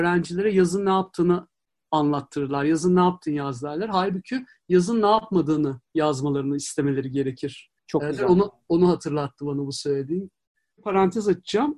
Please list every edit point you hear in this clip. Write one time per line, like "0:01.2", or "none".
0:07.8